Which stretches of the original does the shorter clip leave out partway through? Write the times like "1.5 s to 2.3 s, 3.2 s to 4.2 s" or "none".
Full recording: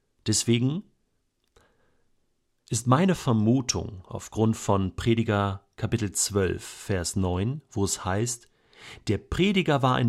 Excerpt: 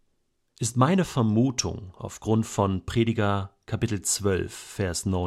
none